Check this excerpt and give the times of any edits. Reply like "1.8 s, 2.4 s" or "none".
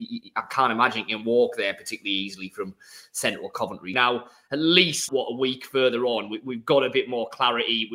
3.9 s, 5.1 s